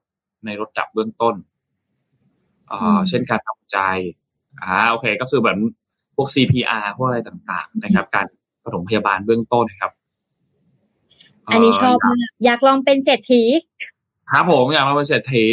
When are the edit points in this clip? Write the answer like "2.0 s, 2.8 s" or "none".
9.6 s, 12.4 s